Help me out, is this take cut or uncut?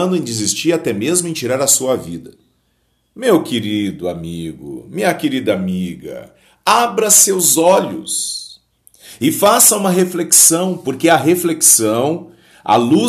uncut